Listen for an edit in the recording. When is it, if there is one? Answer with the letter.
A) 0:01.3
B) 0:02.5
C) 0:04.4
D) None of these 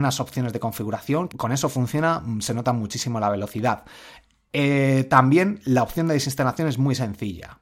A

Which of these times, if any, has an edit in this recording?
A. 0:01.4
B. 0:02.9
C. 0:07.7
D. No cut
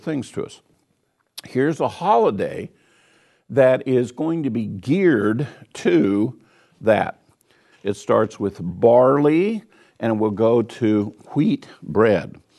C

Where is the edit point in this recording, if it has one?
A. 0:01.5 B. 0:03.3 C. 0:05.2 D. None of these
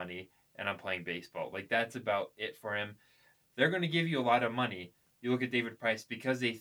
B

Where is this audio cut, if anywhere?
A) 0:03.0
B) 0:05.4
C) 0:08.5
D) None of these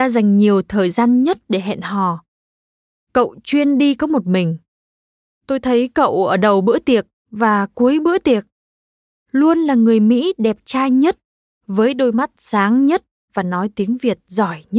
A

